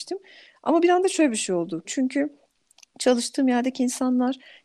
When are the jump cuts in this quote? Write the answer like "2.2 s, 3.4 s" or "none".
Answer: 1.8 s